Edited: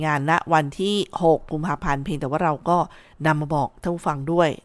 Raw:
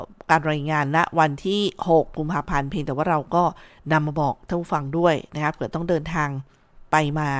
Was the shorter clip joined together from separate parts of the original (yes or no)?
no